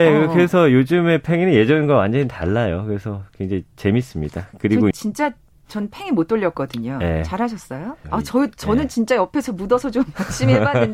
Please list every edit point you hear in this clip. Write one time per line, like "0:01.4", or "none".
0:04.9
0:08.0